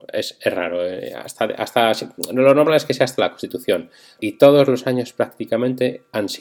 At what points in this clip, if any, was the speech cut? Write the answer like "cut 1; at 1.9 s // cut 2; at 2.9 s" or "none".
cut 1; at 4.2 s